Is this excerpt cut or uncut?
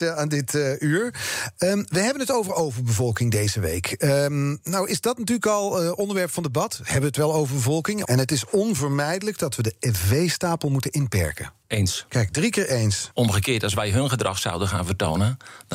cut